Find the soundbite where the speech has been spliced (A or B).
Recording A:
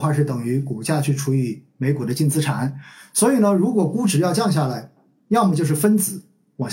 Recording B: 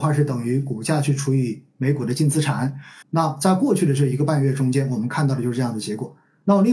B